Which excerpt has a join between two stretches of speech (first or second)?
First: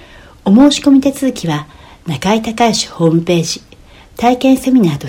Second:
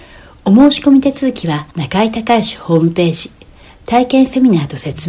second